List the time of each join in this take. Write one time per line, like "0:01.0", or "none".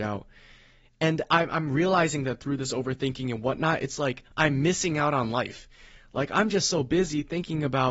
none

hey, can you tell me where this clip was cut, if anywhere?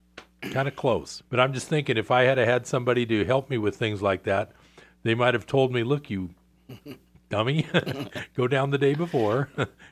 0:01.3

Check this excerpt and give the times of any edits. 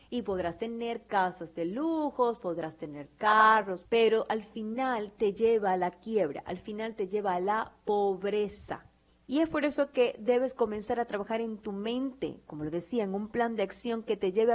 0:03.8

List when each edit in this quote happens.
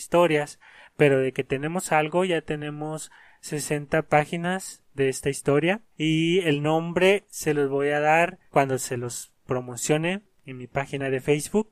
0:05.9
0:08.5

